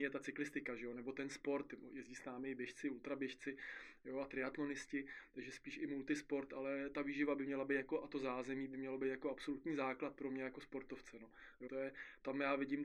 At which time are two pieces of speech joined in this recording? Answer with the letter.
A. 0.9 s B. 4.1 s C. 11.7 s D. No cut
C